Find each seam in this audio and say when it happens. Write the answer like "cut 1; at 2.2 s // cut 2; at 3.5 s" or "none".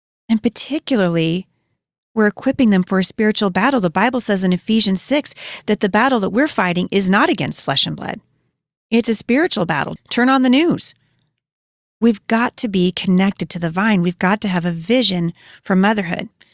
cut 1; at 10.0 s